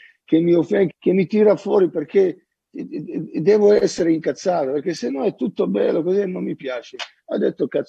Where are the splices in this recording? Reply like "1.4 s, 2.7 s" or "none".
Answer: 0.9 s